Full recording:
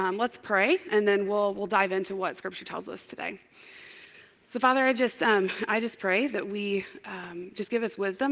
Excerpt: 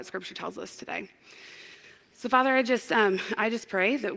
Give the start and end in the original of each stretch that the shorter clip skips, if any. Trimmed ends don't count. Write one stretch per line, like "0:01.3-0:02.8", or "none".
none